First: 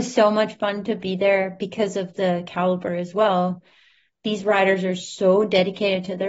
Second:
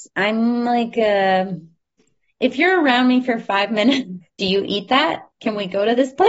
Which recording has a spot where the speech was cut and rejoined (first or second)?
second